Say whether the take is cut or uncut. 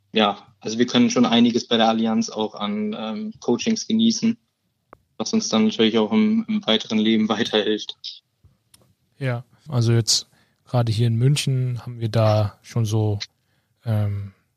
cut